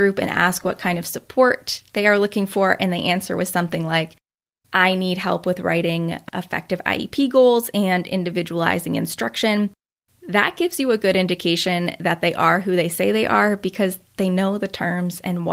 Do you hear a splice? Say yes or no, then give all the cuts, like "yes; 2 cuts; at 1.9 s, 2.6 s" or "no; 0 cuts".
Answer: no; 0 cuts